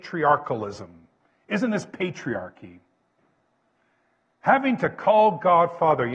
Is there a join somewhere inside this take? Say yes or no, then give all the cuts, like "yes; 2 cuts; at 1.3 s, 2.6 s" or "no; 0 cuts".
no; 0 cuts